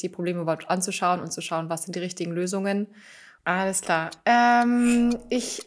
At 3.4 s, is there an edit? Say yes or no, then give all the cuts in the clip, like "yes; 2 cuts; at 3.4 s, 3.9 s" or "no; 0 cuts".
yes; 1 cut; at 3.4 s